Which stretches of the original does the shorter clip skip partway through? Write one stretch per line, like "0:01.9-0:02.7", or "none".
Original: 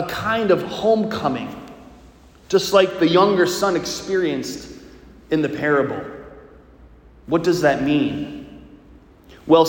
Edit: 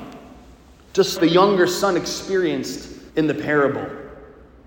0:02.7-0:02.9
0:04.9-0:05.2